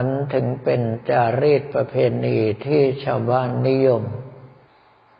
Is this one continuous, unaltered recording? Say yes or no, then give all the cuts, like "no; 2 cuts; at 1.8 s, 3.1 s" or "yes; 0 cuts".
yes; 0 cuts